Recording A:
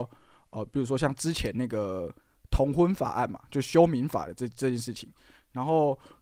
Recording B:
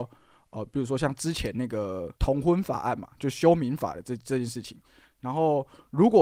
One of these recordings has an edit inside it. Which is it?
B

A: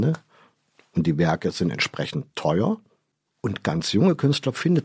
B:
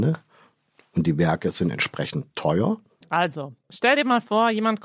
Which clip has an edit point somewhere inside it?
B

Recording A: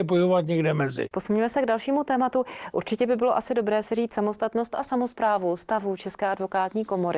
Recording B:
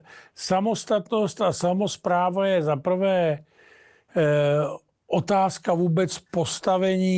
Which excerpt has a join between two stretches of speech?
A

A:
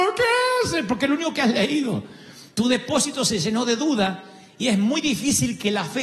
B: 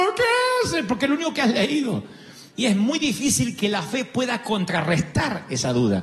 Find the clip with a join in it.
B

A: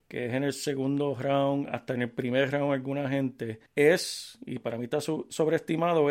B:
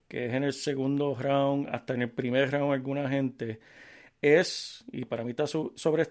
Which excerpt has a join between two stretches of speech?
A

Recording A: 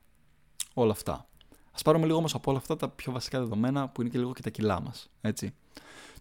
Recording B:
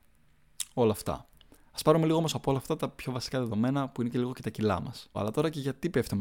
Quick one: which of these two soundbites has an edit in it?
B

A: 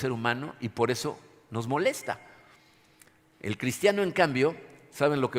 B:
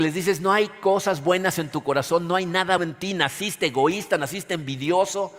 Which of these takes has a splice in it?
B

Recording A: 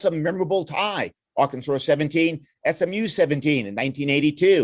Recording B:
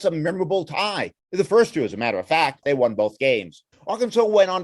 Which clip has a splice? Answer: B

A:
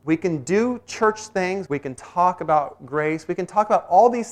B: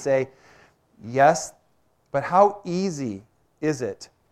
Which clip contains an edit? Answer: A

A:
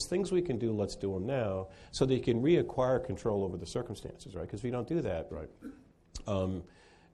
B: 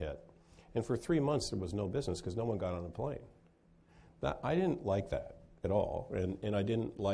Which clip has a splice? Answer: A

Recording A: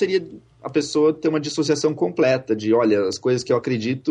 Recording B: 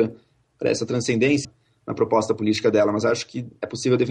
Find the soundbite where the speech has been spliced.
B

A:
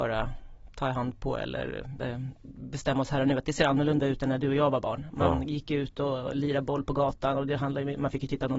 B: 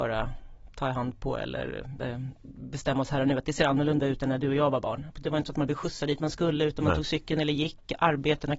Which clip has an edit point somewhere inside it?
B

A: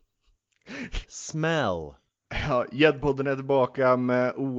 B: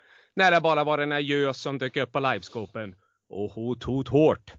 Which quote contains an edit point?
A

